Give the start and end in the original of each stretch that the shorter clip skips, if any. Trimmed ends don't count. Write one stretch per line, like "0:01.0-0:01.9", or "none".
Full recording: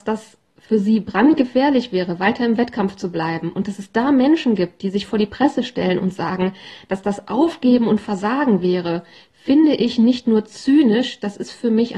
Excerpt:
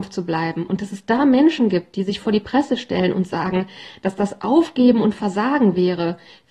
none